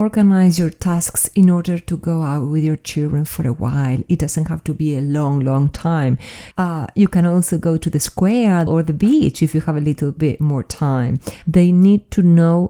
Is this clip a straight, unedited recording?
no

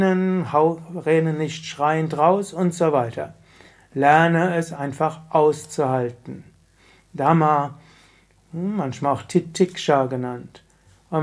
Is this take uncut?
yes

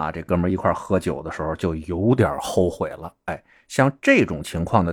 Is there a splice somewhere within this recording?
no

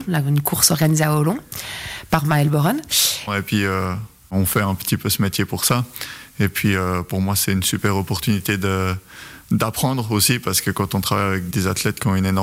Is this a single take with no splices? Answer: no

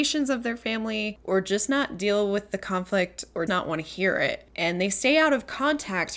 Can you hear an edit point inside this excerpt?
yes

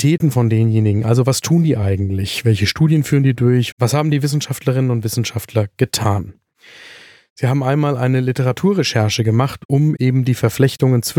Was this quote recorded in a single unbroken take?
no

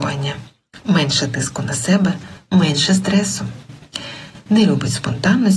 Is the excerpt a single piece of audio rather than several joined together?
no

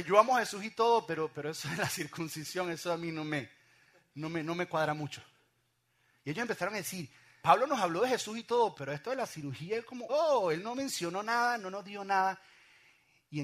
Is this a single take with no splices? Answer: no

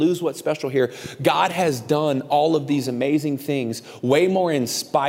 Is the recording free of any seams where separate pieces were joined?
yes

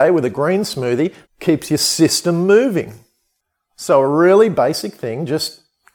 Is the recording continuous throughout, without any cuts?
no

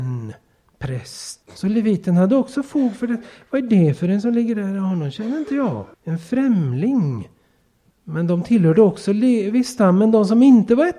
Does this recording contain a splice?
yes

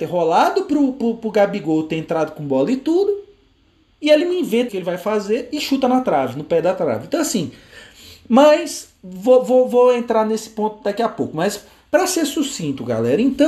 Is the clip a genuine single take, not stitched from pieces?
no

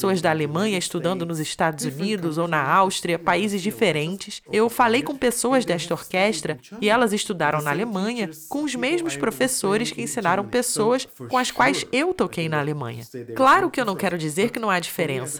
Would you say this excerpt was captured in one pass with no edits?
no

